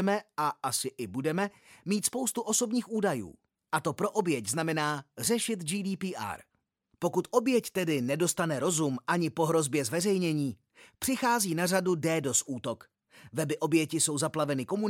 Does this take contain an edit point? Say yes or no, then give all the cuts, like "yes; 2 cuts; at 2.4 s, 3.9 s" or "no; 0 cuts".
no; 0 cuts